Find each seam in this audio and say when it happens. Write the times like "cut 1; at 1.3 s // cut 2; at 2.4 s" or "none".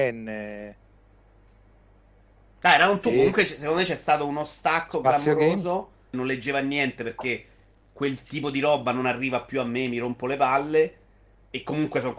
cut 1; at 6.1 s